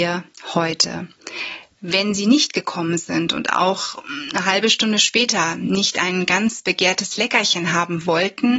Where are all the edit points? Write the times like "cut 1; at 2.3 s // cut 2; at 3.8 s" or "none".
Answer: cut 1; at 1.8 s